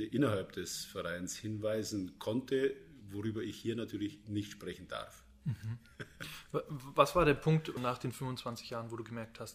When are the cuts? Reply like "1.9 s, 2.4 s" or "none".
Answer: none